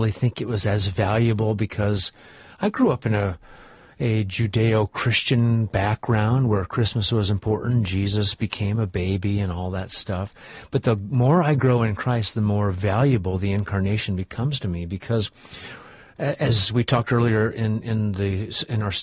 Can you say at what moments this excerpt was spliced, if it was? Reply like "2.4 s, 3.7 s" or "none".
none